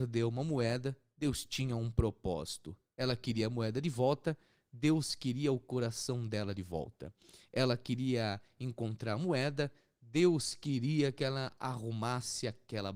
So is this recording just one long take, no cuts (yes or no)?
yes